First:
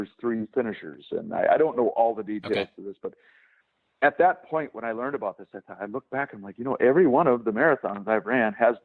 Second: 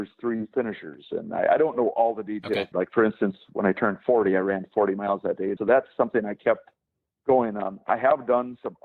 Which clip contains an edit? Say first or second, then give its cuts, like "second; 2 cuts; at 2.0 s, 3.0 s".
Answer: second; 2 cuts; at 2.7 s, 5.6 s